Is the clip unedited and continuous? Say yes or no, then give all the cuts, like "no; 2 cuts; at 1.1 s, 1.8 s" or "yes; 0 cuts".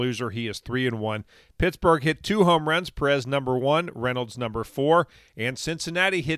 yes; 0 cuts